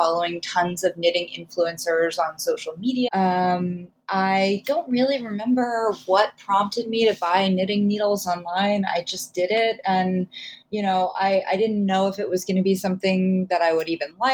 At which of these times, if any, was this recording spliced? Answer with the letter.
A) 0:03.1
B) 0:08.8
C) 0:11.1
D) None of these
A